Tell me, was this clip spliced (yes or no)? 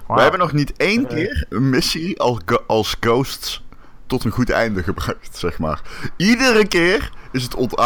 yes